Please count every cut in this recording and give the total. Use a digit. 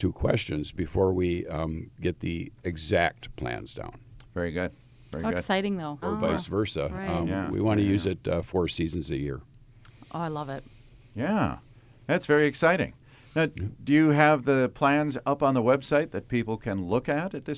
1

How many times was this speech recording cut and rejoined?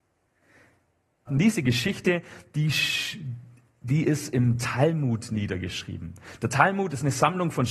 1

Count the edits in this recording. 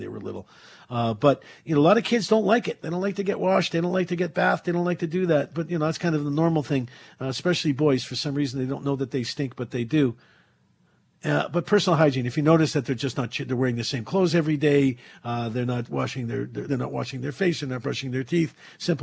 1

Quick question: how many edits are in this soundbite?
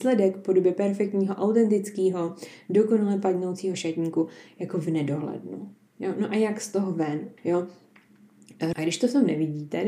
2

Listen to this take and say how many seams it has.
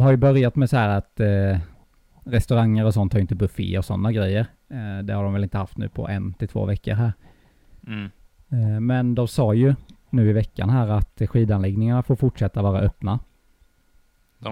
0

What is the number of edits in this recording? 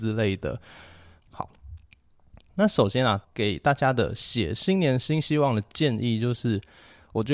2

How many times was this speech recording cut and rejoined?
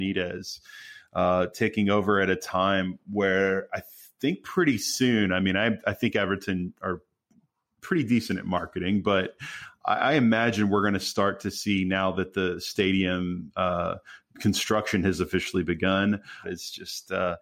1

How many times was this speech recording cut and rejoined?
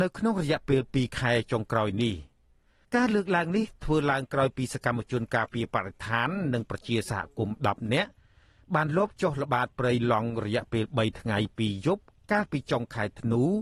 0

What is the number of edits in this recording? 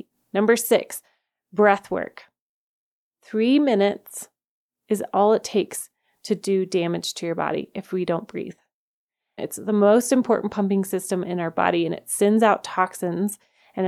1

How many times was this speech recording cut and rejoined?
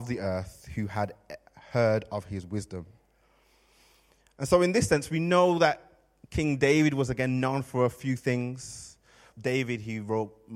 1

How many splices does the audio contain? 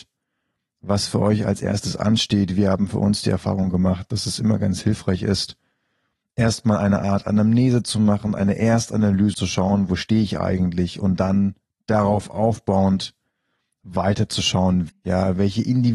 2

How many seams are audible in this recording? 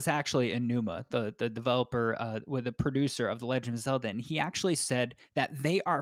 0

